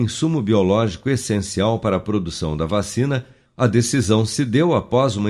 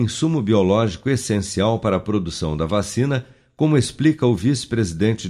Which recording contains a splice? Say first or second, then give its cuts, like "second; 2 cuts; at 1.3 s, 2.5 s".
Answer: first; 1 cut; at 3.4 s